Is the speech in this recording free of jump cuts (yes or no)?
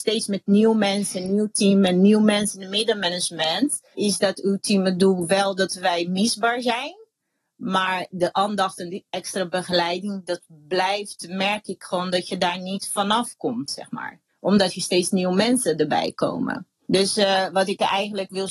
yes